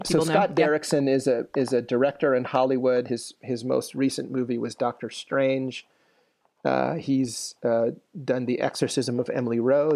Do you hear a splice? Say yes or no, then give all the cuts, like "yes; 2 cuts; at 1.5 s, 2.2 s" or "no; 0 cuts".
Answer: no; 0 cuts